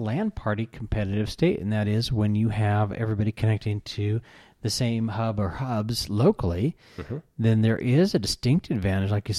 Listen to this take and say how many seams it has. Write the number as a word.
zero